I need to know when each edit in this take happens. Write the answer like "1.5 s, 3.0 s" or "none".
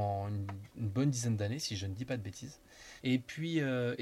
3.0 s